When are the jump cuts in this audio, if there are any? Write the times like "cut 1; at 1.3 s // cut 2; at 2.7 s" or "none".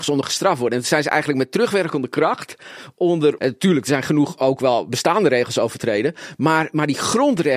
cut 1; at 3.4 s